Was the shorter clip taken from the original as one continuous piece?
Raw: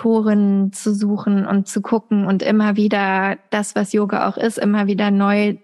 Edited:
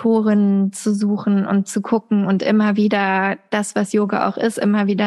yes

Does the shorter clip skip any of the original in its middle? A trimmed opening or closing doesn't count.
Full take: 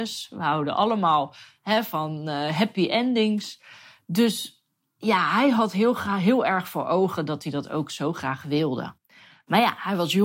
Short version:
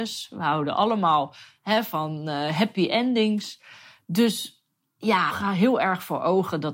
yes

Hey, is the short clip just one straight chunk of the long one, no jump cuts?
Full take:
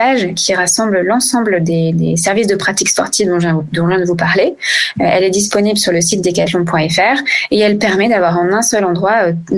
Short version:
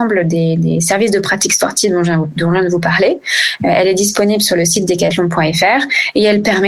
yes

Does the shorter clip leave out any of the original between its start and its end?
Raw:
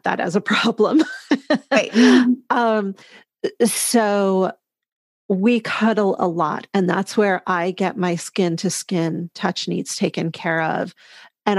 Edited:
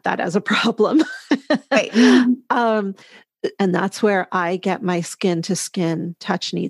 yes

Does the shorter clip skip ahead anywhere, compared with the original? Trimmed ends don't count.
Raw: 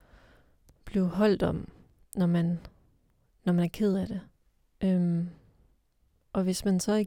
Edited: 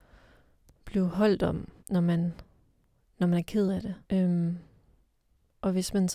yes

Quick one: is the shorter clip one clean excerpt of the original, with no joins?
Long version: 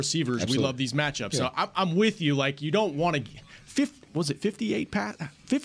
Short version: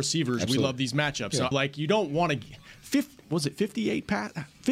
no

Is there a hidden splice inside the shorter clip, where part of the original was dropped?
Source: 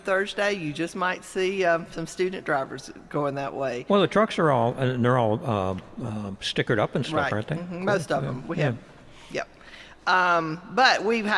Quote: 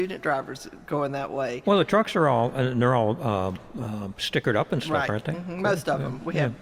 no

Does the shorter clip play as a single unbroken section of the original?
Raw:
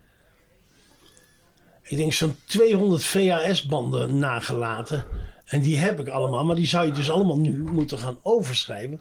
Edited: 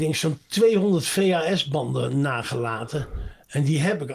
yes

